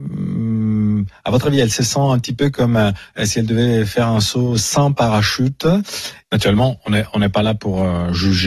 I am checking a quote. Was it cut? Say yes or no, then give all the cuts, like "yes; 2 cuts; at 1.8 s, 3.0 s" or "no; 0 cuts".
yes; 1 cut; at 6.2 s